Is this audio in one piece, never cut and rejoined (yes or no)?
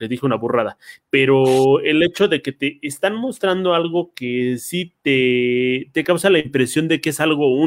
yes